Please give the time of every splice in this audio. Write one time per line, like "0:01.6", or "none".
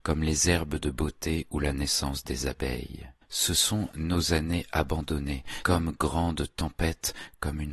0:03.2
0:05.6